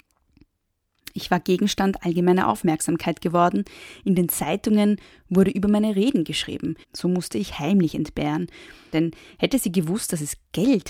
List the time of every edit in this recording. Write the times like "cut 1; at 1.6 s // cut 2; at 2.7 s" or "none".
cut 1; at 6.8 s // cut 2; at 8.9 s